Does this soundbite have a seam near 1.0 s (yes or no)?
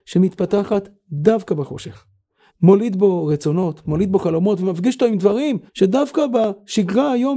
no